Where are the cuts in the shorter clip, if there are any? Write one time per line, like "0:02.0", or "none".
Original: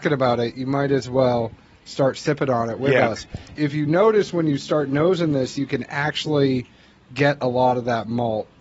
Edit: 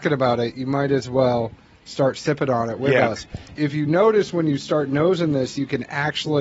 none